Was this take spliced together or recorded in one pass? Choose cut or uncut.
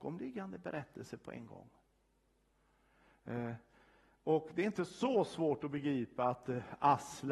uncut